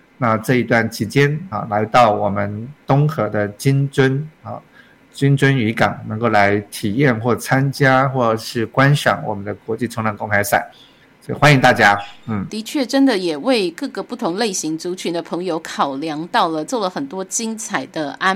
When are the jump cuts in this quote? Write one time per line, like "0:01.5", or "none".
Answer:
0:01.5
0:12.5